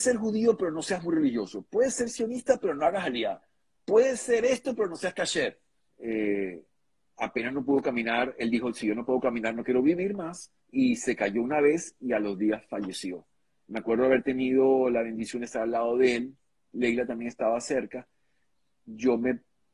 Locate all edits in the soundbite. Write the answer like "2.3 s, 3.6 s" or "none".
5.9 s, 10.6 s